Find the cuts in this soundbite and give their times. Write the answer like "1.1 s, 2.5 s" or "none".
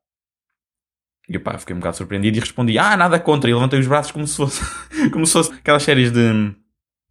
5.5 s

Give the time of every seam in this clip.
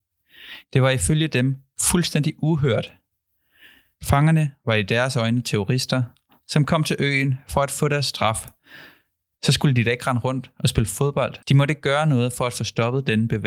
11.4 s

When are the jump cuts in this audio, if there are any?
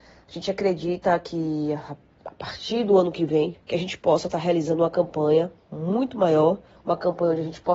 3.5 s

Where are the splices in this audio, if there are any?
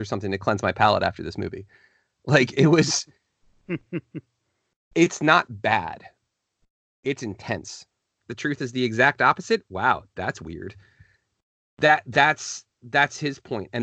8.2 s

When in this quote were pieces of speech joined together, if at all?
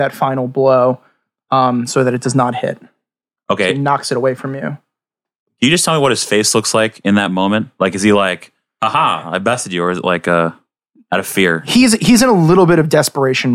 none

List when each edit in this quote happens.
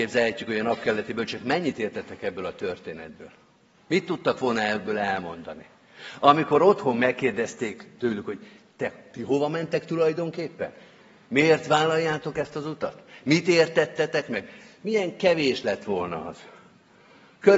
none

